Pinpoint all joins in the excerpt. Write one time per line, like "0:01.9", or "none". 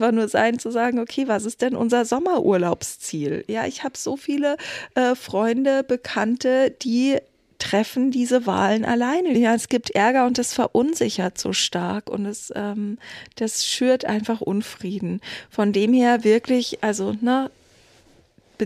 0:09.3